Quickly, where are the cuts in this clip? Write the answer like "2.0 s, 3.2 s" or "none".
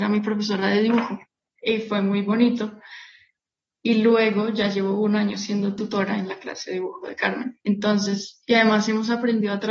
none